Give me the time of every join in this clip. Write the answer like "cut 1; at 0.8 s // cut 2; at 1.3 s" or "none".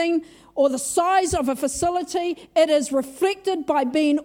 none